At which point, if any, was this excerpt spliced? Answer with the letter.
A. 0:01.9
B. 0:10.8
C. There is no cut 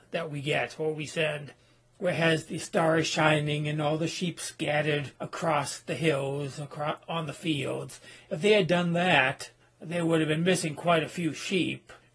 C